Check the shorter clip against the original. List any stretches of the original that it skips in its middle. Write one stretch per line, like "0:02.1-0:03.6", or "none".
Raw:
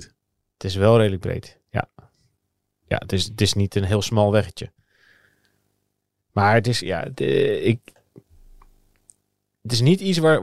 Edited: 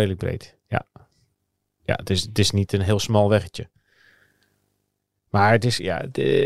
none